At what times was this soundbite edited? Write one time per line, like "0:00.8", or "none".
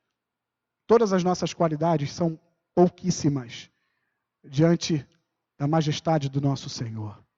none

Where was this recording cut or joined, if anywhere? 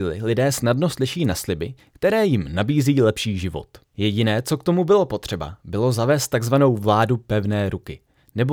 0:03.9

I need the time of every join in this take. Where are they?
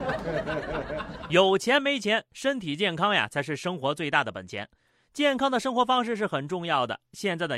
none

